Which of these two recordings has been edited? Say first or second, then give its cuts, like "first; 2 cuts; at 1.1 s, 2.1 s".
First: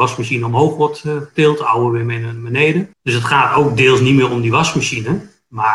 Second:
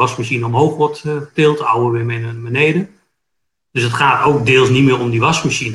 first; 1 cut; at 2.9 s